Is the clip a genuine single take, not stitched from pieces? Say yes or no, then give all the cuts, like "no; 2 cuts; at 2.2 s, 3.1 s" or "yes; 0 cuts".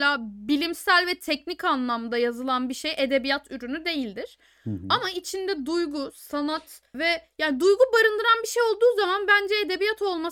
no; 1 cut; at 6.9 s